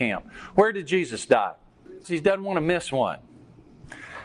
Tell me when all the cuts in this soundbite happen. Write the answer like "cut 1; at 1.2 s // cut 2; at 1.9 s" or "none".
cut 1; at 2.0 s